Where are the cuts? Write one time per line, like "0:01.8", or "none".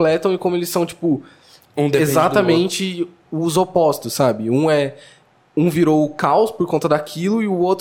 none